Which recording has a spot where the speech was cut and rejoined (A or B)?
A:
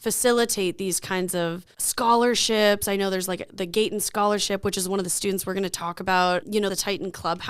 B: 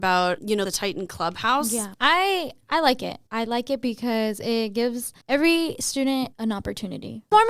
B